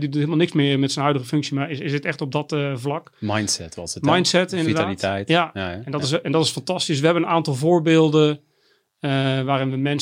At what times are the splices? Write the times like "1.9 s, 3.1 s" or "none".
none